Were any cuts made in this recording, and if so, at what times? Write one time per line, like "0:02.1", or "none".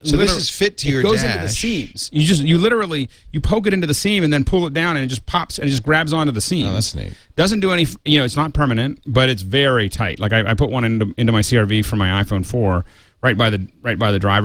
none